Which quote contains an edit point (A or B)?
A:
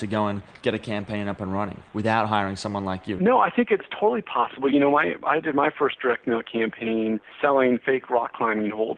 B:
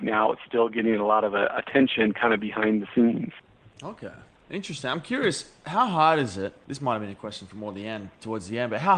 A